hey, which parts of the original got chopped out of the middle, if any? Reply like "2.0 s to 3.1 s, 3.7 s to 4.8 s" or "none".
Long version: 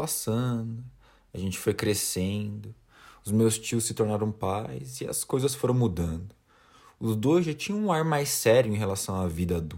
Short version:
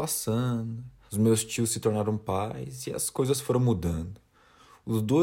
1.1 s to 3.2 s